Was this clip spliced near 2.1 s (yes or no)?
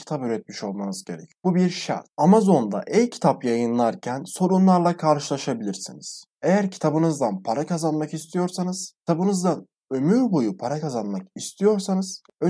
no